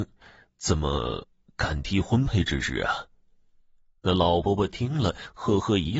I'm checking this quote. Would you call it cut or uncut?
uncut